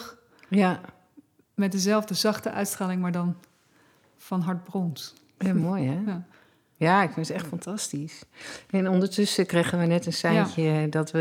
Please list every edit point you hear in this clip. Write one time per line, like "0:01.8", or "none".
none